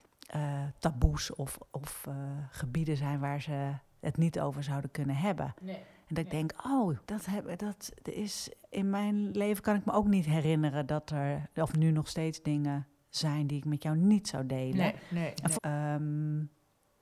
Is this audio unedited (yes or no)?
no